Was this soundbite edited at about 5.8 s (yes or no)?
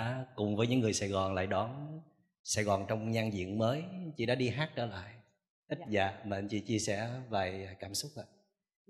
yes